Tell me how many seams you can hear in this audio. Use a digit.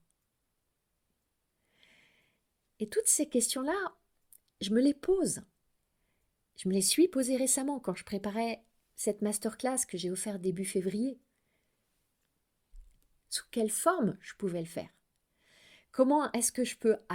1